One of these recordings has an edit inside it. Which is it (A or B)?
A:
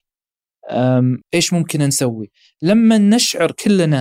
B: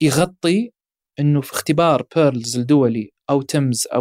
A